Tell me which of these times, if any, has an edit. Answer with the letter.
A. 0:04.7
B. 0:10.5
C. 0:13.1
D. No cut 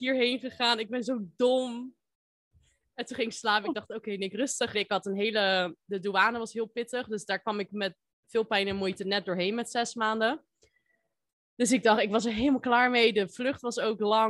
A